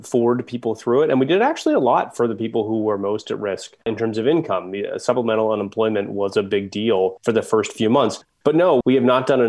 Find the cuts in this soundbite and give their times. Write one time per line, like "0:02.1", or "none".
none